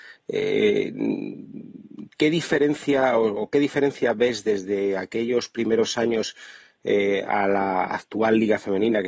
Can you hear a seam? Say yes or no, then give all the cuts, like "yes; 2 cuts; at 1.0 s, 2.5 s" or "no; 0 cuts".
no; 0 cuts